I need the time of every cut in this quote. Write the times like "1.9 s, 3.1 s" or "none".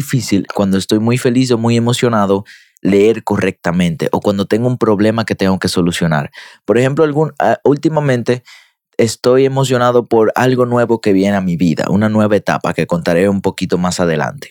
none